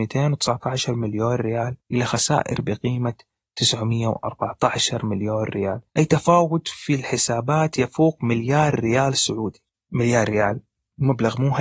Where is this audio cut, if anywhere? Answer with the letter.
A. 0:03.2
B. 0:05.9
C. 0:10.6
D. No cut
B